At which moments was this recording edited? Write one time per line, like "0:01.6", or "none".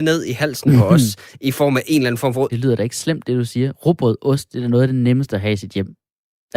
0:02.5